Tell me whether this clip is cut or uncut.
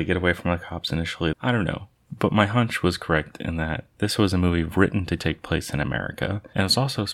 cut